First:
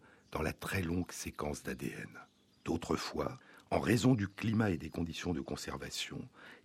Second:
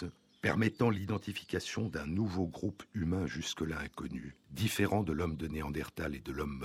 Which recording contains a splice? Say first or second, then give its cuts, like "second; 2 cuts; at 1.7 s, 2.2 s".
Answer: first; 1 cut; at 2.5 s